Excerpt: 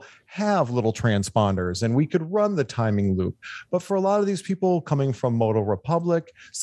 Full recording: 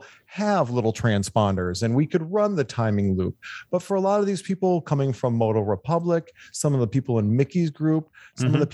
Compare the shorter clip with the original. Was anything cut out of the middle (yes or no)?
no